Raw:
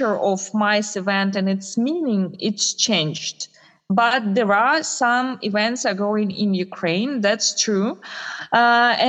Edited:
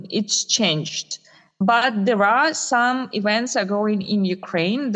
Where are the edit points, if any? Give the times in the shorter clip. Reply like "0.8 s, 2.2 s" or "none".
none